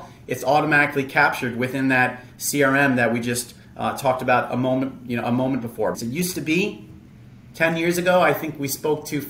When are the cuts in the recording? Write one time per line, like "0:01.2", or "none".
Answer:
0:05.9